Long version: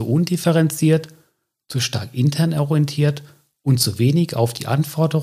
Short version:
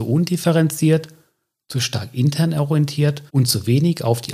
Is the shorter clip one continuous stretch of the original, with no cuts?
no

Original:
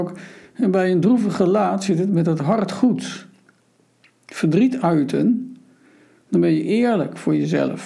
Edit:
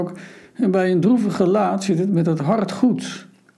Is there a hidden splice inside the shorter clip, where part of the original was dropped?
no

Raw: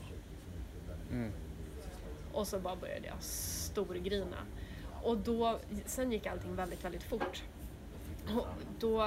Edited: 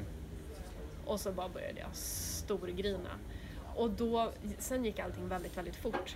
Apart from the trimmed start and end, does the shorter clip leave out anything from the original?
no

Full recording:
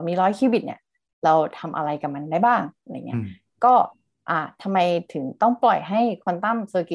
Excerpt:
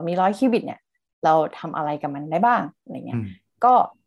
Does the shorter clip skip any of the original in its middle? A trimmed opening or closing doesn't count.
no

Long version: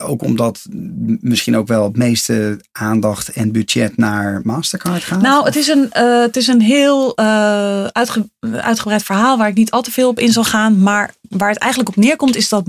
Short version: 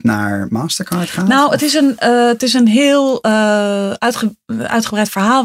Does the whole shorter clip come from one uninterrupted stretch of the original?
yes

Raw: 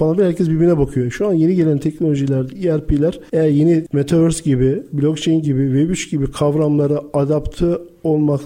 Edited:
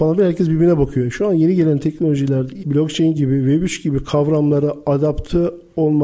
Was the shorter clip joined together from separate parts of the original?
yes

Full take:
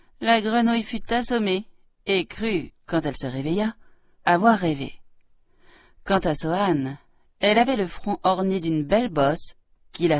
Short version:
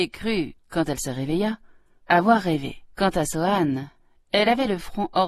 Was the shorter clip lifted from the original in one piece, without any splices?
no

